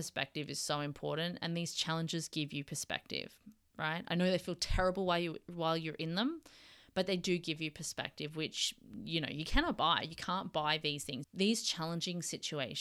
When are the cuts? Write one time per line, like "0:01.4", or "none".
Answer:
0:11.2